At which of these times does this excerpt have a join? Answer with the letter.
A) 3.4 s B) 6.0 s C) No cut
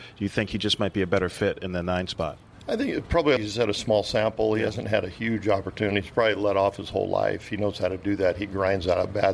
A